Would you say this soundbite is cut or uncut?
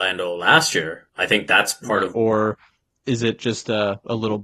cut